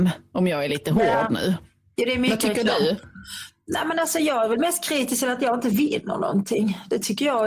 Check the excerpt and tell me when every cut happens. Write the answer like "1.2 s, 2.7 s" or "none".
none